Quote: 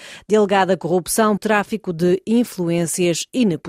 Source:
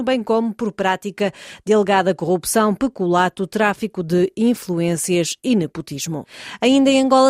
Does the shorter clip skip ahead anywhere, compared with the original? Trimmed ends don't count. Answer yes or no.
yes